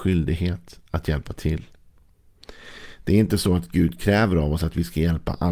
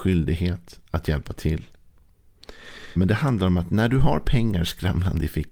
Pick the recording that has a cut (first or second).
second